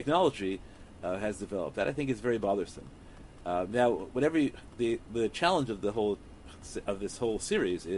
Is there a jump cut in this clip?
no; 0 cuts

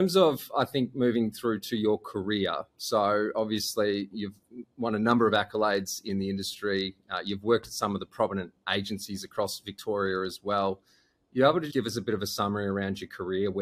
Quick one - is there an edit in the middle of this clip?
yes; 1 cut; at 11.7 s

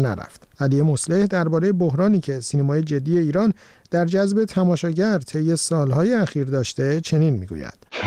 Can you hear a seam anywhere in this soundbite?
no; 0 cuts

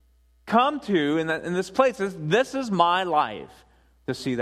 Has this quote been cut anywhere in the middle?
no; 0 cuts

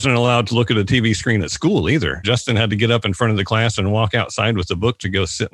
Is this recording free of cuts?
no; 1 cut; at 2.2 s

